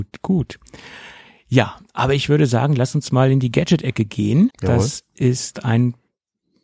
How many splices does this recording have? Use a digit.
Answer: 1